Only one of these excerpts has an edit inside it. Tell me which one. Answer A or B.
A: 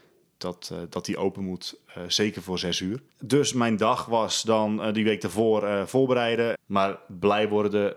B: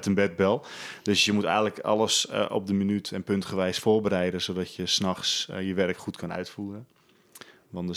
A